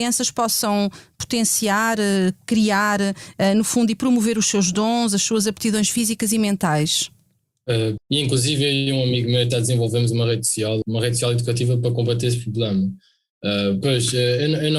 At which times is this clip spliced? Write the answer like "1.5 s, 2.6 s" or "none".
8.0 s, 10.8 s, 13.8 s

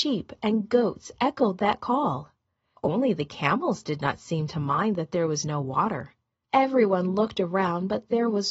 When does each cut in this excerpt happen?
2.8 s, 6.4 s

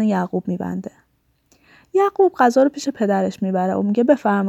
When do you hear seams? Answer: none

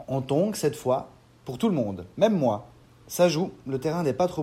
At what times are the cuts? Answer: none

